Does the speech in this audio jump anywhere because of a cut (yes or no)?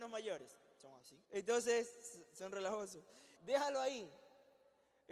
yes